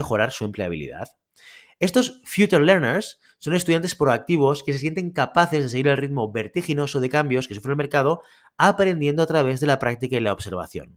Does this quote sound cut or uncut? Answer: uncut